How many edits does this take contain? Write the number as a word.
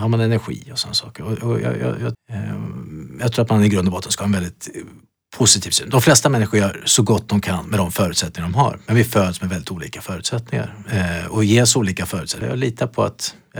two